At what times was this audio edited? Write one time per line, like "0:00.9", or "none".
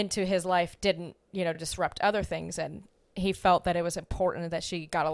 none

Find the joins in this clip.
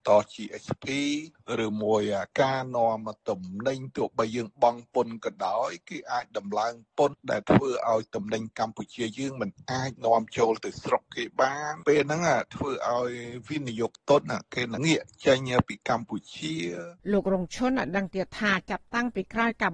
0:14.8
0:17.0

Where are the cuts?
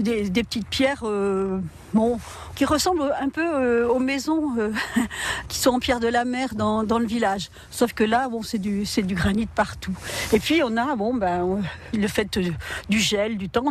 none

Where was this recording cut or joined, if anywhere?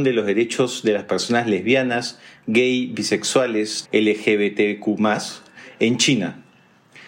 0:03.8

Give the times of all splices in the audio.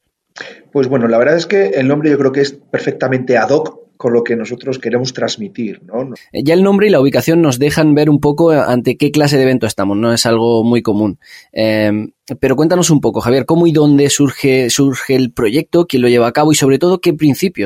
0:04.8
0:06.2

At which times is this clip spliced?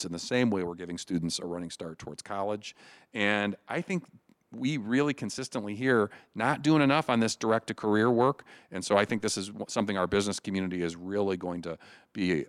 none

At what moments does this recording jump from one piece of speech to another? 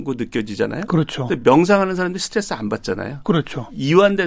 none

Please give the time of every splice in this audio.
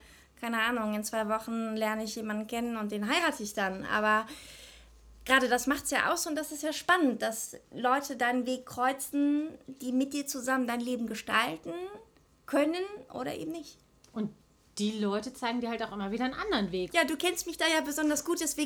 0:16.9

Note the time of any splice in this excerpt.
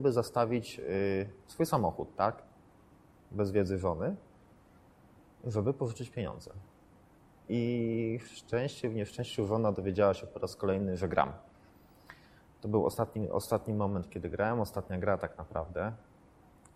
none

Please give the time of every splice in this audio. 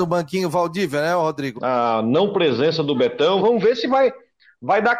0:01.6
0:03.4

